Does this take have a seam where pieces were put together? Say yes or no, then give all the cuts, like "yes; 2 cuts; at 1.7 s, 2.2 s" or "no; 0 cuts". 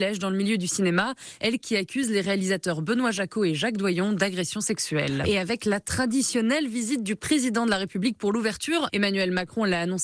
yes; 2 cuts; at 5.2 s, 8.9 s